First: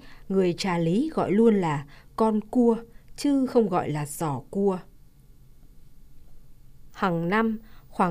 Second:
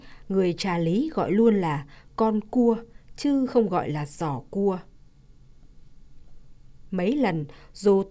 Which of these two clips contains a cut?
first; 1 cut; at 6.9 s

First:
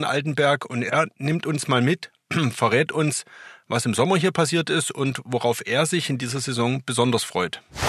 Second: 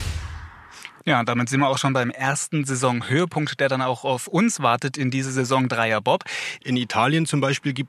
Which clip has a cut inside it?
second; 2 cuts; at 1.0 s, 6.6 s

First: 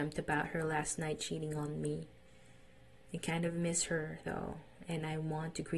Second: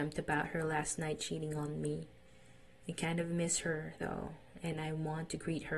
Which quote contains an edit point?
second; 1 cut; at 2.7 s

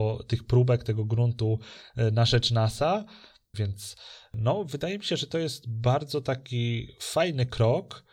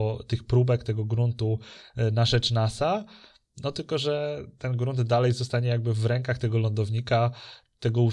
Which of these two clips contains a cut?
first; 1 cut; at 3.5 s

